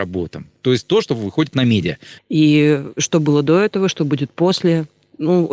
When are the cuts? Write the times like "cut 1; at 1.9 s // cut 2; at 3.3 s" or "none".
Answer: cut 1; at 2.2 s